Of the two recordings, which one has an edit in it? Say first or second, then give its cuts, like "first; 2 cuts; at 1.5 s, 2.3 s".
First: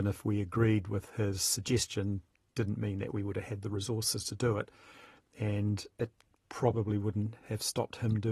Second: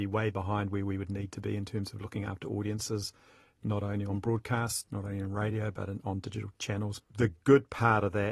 second; 1 cut; at 7.0 s